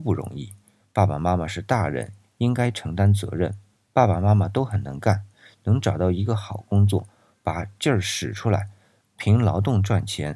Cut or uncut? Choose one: uncut